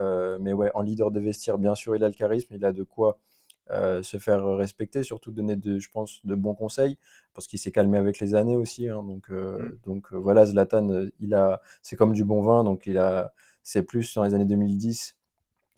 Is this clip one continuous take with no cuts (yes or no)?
yes